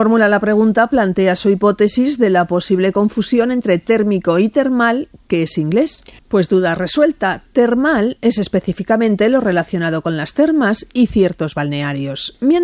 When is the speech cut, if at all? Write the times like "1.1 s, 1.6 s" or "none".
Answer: 6.2 s